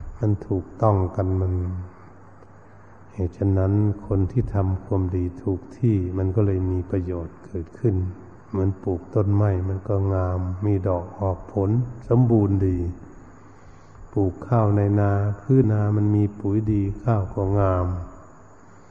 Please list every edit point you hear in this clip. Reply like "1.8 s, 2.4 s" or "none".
8.4 s, 15.6 s